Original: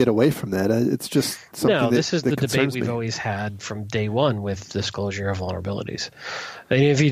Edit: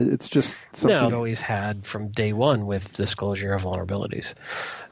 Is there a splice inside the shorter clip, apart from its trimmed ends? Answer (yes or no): yes